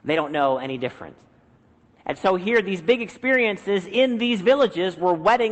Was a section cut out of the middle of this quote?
no; 0 cuts

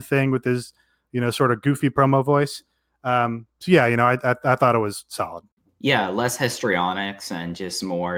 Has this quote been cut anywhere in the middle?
no; 0 cuts

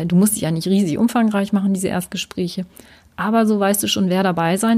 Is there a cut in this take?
no; 0 cuts

